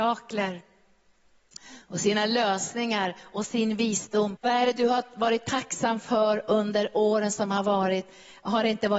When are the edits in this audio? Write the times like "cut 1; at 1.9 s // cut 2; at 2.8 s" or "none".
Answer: cut 1; at 4.4 s